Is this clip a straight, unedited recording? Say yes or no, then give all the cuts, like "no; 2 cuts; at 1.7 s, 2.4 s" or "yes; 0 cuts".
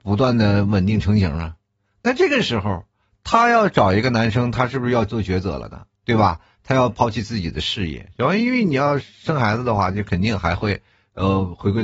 yes; 0 cuts